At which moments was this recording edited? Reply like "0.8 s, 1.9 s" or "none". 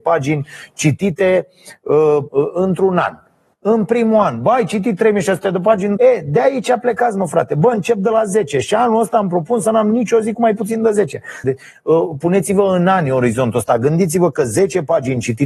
2.3 s, 6.0 s, 11.4 s